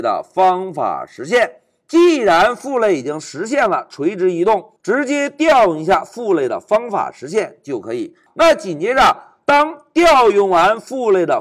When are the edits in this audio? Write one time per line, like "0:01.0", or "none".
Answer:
0:04.8